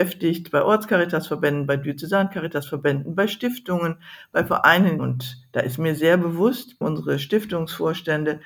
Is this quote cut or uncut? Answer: cut